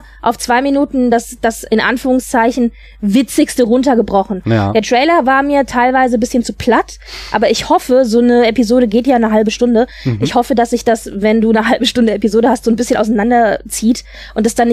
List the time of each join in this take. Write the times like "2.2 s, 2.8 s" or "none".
none